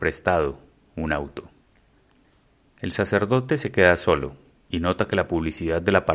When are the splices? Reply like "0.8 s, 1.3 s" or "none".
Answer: none